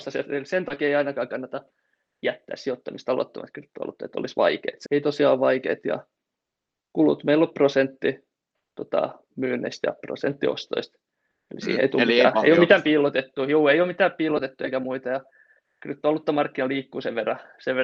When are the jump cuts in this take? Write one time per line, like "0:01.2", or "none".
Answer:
0:04.9